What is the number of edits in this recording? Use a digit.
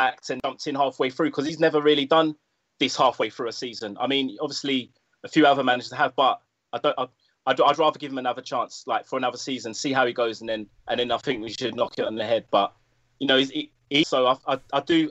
1